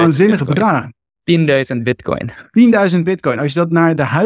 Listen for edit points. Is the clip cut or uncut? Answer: cut